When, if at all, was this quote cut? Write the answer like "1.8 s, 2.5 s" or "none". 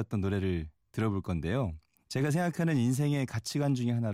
2.0 s